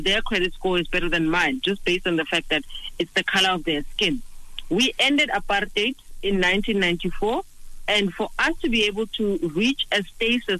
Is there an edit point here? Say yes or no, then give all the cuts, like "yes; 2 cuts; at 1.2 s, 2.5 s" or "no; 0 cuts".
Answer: no; 0 cuts